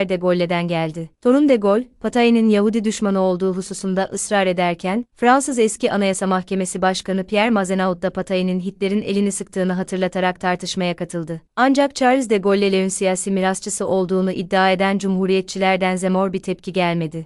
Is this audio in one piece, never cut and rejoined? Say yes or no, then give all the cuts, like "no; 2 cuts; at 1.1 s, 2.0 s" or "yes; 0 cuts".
yes; 0 cuts